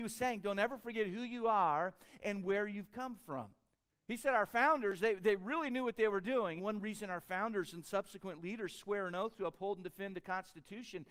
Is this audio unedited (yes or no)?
no